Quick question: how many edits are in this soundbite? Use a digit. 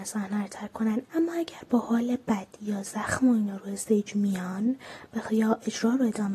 1